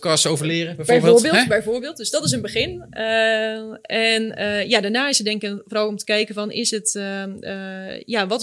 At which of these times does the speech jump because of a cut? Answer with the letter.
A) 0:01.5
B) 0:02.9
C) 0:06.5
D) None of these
D